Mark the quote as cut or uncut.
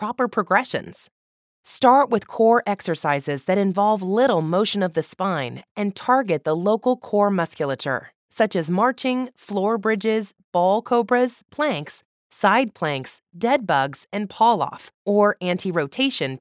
uncut